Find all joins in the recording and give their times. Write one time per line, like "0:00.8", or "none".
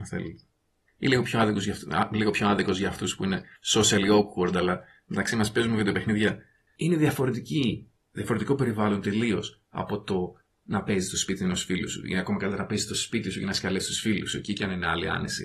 0:06.7